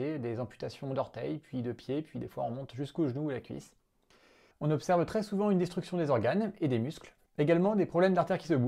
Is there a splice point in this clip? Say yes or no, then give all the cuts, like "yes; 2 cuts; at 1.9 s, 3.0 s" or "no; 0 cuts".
yes; 2 cuts; at 4.5 s, 7.3 s